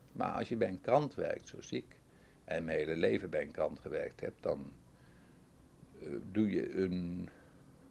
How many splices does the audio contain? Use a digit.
0